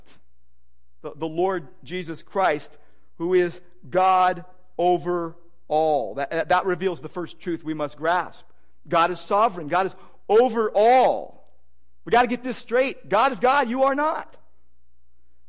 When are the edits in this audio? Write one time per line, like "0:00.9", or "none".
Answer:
none